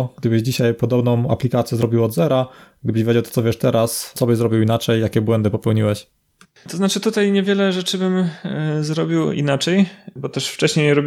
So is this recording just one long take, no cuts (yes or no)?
no